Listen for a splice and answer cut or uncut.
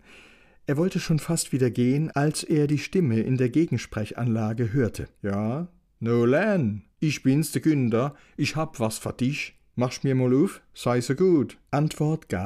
uncut